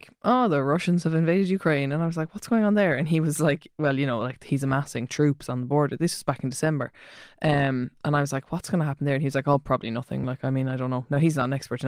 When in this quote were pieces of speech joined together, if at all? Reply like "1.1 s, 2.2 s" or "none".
none